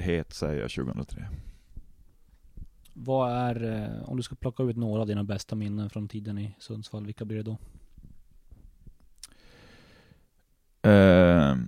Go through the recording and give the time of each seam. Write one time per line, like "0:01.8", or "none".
none